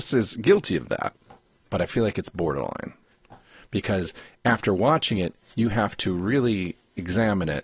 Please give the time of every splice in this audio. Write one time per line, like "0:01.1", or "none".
none